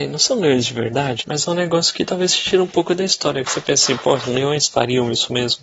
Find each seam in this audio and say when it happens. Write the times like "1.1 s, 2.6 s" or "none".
1.2 s